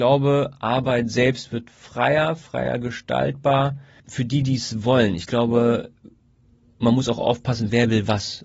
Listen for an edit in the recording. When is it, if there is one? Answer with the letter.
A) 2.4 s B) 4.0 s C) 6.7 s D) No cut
B